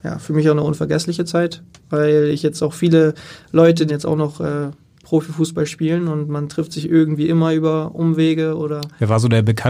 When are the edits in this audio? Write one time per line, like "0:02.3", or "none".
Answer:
0:03.9